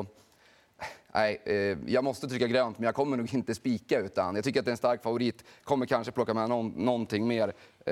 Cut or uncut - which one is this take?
uncut